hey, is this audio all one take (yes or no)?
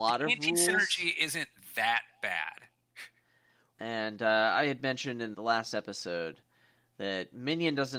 no